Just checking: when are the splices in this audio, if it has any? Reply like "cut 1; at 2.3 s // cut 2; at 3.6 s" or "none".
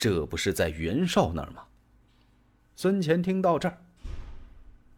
cut 1; at 2.6 s